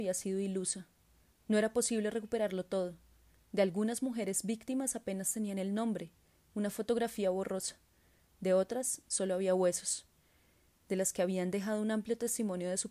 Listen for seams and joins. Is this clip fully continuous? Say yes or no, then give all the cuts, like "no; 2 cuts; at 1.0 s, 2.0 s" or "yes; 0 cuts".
yes; 0 cuts